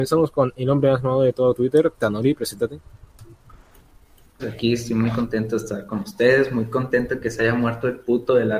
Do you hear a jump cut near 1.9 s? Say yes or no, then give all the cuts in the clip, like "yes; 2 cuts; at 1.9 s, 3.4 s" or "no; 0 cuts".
no; 1 cut; at 4.4 s